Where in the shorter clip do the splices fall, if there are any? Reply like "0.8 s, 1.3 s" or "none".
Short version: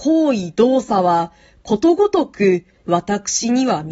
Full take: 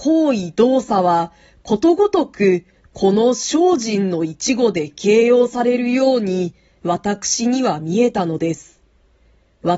2.8 s